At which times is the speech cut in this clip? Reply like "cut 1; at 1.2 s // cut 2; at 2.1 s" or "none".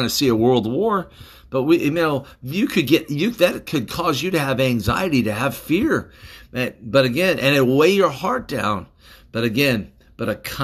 none